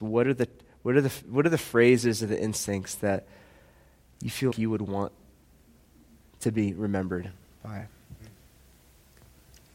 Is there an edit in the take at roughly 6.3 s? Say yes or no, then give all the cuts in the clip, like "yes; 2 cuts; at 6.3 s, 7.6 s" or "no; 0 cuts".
no; 1 cut; at 4.5 s